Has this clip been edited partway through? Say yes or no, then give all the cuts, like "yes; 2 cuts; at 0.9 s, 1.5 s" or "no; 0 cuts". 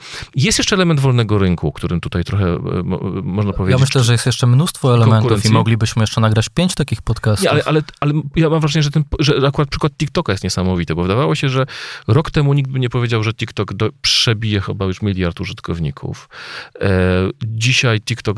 no; 0 cuts